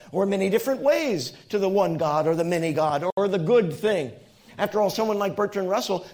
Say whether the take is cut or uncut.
uncut